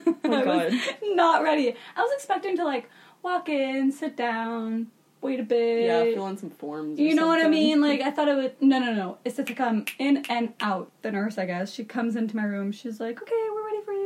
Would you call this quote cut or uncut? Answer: uncut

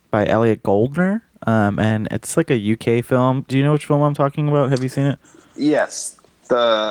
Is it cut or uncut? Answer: uncut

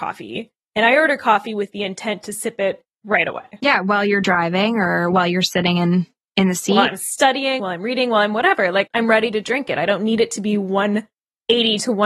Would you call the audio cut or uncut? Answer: cut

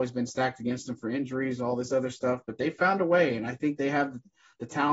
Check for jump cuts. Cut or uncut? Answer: uncut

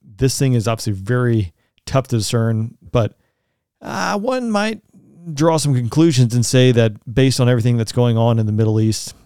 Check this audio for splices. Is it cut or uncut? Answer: cut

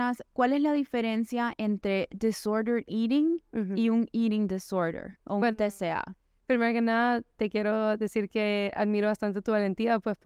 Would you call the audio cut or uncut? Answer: uncut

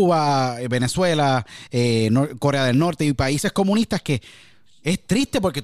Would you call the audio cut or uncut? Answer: uncut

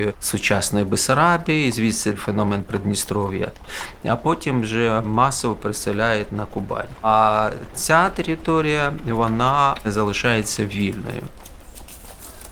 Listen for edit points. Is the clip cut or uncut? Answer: uncut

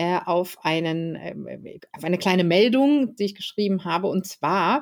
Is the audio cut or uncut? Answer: cut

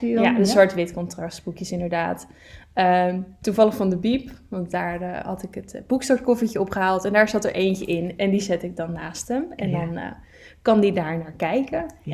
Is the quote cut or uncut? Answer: uncut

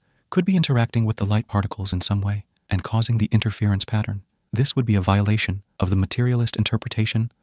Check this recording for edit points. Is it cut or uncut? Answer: uncut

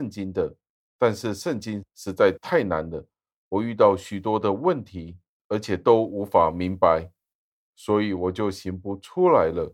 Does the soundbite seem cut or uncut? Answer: uncut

